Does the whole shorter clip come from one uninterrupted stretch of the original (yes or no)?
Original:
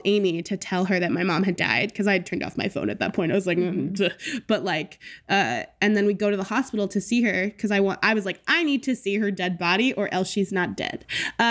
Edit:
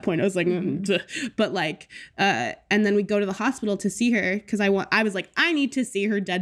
yes